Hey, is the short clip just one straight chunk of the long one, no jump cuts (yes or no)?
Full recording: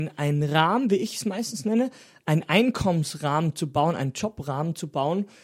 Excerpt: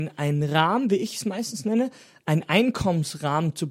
yes